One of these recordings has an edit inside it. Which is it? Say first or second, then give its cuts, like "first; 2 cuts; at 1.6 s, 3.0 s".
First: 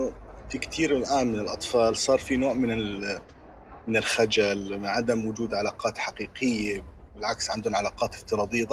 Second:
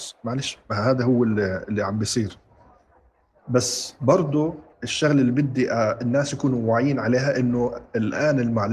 second; 1 cut; at 4.7 s